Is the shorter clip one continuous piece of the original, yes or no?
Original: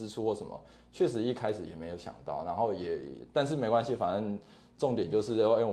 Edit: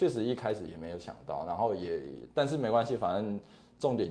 yes